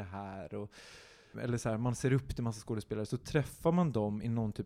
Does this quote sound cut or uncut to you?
cut